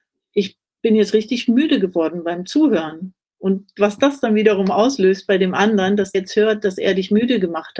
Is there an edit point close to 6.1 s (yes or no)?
yes